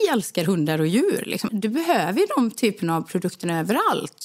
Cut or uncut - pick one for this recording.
cut